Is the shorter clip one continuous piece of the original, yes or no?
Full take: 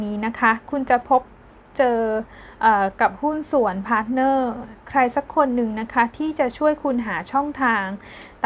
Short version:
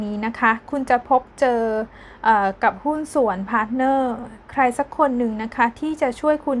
no